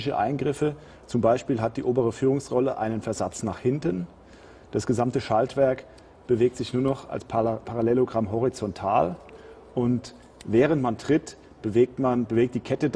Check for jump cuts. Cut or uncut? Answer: uncut